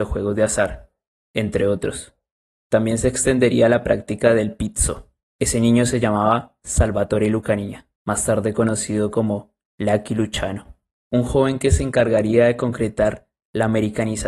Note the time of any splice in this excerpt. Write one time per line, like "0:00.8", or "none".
0:05.2
0:08.0